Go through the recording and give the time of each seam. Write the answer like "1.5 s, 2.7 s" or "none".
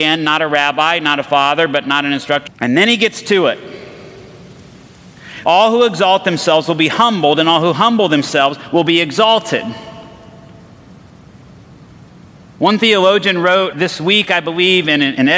2.5 s, 5.4 s